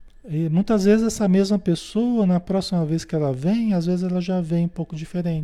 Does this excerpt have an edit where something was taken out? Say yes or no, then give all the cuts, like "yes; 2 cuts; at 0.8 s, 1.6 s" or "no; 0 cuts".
no; 0 cuts